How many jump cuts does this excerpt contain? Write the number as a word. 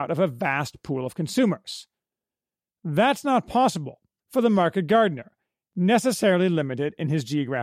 one